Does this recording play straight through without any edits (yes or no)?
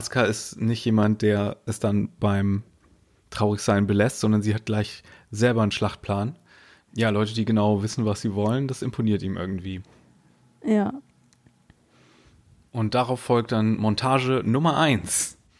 no